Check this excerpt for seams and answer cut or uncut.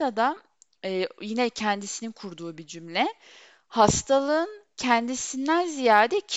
uncut